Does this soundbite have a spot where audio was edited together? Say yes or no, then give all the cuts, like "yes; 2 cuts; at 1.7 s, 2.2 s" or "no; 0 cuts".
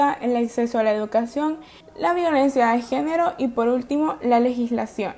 yes; 1 cut; at 1.8 s